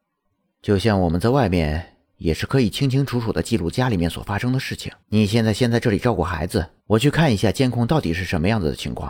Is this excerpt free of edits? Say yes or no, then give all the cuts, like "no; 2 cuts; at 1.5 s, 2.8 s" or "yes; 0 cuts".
no; 2 cuts; at 5.0 s, 6.8 s